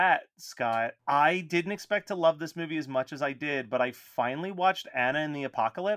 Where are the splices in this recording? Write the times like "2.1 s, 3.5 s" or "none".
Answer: none